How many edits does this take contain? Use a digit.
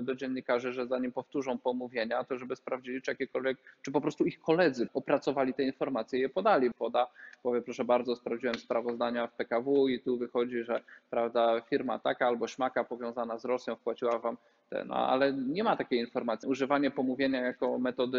3